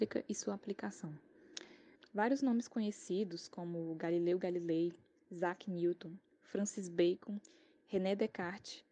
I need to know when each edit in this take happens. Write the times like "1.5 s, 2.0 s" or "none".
2.0 s

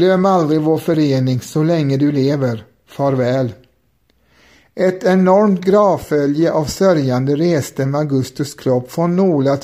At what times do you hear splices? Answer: none

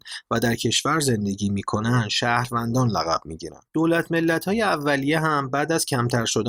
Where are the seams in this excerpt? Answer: 3.7 s

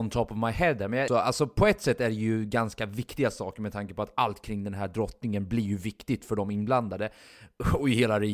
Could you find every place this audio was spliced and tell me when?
1.1 s

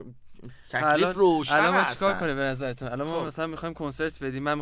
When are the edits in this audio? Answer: none

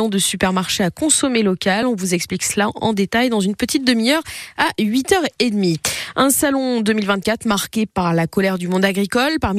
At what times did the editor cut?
none

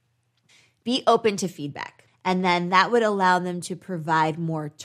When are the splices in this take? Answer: 2.1 s

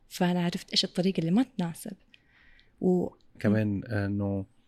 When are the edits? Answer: 3.4 s

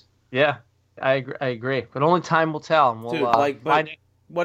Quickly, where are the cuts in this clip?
1.0 s

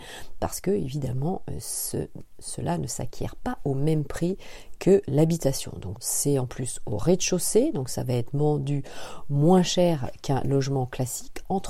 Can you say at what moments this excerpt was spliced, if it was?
6.0 s

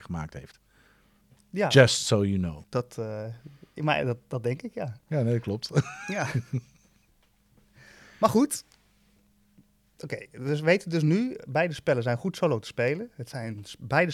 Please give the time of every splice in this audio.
2.6 s

